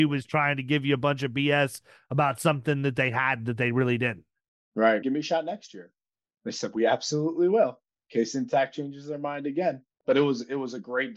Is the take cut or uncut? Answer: cut